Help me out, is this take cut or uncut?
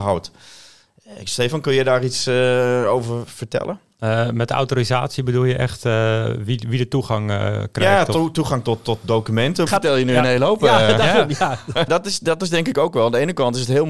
cut